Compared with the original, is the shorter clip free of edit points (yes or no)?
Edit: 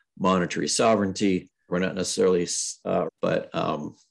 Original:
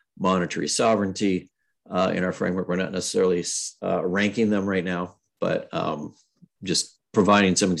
no